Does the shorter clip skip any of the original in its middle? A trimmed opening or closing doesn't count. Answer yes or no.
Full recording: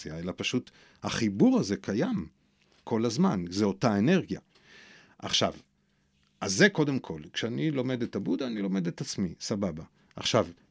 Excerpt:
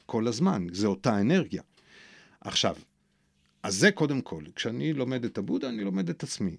no